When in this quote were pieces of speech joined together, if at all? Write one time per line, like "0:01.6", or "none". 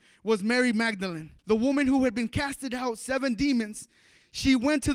0:01.4